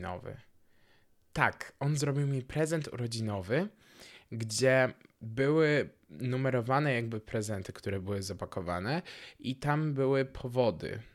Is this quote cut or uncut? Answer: uncut